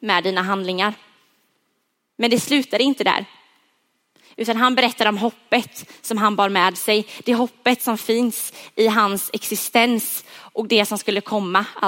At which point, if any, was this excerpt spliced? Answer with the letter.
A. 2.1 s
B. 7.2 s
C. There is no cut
A